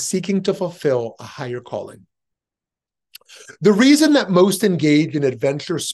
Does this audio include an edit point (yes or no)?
no